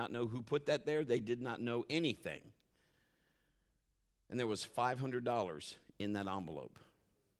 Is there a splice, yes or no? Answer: no